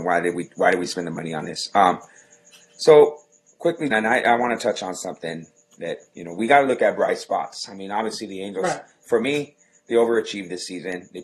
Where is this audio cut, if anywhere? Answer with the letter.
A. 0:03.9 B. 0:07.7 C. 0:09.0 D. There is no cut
A